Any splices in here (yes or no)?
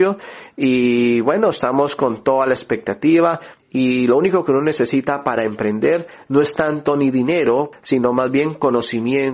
yes